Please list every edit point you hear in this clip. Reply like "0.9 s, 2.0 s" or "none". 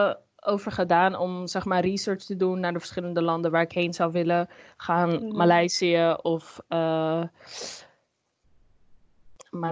none